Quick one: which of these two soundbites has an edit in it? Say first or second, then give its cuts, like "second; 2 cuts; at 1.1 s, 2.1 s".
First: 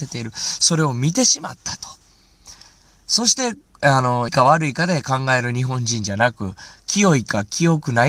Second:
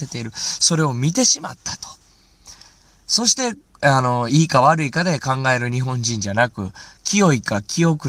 first; 1 cut; at 4.3 s